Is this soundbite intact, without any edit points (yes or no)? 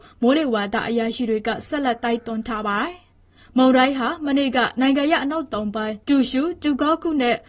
yes